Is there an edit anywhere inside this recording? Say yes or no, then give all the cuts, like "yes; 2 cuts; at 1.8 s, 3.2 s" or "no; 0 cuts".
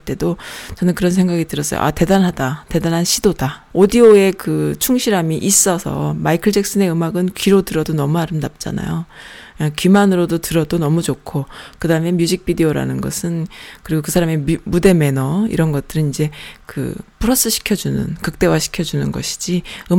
yes; 1 cut; at 3.7 s